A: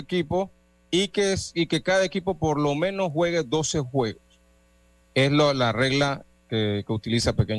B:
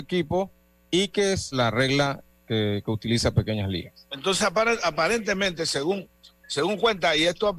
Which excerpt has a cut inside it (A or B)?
B